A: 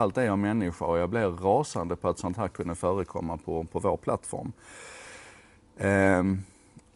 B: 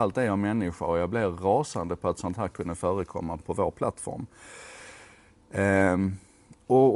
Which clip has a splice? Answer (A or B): B